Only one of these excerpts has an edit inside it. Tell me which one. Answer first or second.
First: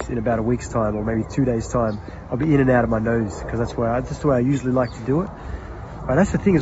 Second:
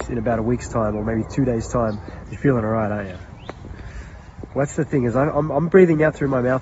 second